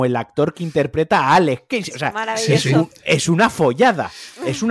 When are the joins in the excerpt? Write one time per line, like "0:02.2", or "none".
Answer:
none